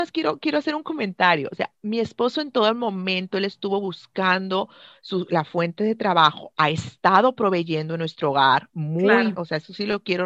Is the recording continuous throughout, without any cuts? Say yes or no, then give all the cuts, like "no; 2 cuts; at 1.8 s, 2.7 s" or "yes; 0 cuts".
no; 1 cut; at 9.3 s